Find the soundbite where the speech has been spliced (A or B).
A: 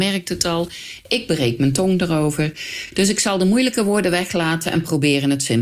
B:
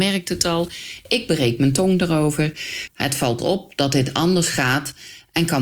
B